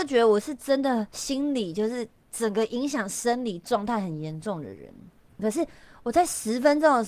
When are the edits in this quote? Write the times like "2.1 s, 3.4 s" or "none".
5.4 s